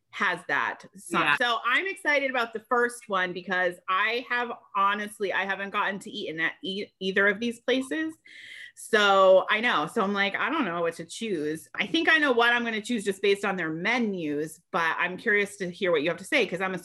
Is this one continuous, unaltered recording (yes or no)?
no